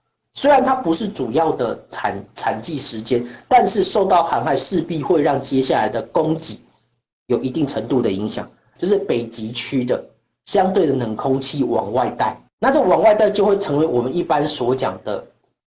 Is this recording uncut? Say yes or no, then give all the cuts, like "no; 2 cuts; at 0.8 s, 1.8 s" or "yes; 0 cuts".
no; 2 cuts; at 8.8 s, 12.5 s